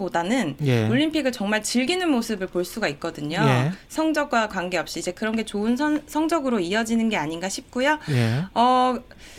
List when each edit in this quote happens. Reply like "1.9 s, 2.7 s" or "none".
none